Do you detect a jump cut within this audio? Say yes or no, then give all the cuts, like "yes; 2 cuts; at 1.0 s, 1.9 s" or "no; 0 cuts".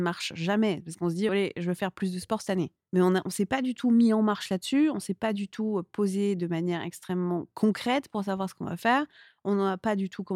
no; 0 cuts